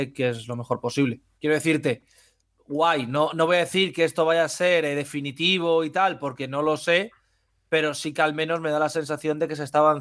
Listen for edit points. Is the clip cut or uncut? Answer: uncut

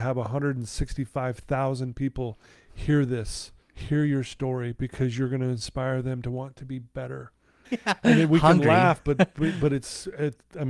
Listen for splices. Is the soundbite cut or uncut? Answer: cut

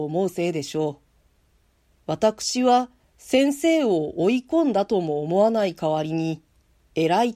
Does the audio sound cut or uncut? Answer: cut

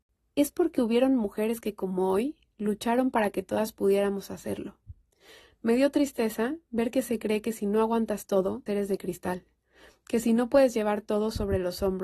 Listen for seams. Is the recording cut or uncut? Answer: cut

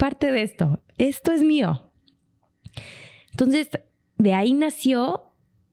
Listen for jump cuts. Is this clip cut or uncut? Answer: uncut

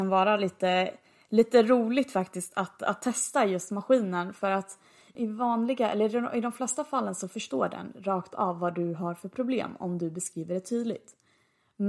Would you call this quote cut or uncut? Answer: uncut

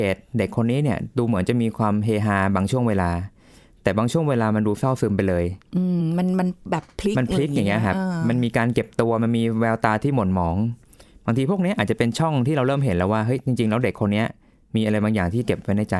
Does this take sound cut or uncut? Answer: uncut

